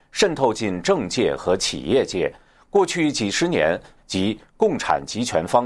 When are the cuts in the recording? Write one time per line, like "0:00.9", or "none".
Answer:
0:04.0